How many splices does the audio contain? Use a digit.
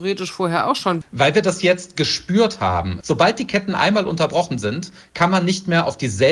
2